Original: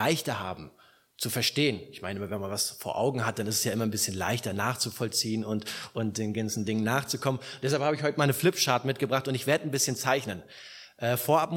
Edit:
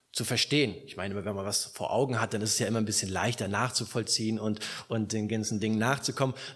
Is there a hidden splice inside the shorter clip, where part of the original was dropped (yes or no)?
no